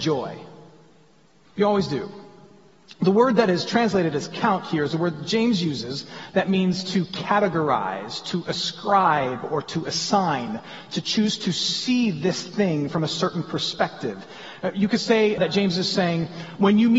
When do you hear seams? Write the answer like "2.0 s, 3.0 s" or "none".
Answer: 1.5 s, 15.4 s